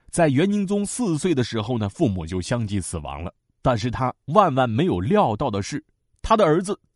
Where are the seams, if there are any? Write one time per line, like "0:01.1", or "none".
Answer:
0:03.6

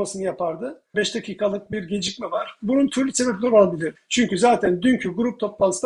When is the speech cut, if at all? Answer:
0:00.9
0:03.9

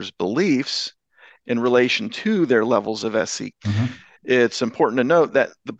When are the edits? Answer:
0:03.5

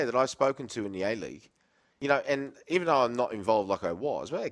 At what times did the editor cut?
none

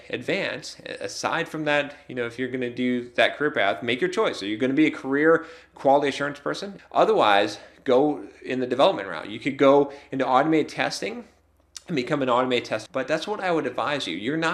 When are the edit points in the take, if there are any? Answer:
0:06.8
0:12.9

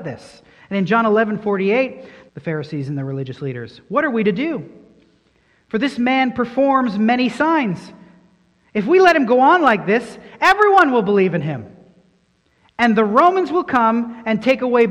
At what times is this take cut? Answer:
0:02.3

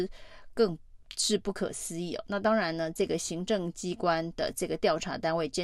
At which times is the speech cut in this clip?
none

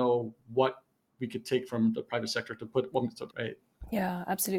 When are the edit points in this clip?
0:03.3

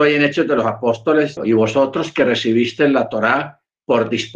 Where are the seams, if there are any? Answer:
0:01.4

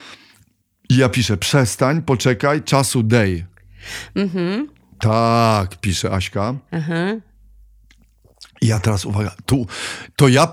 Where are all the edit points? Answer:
none

